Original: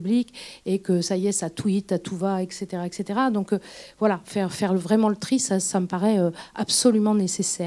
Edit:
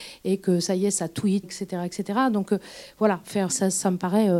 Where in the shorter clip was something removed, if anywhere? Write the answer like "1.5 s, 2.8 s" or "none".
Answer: 1.4 s, 3.5 s